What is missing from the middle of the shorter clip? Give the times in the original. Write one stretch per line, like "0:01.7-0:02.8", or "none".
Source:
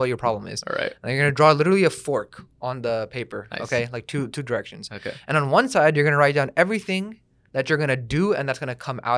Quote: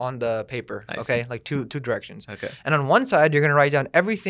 none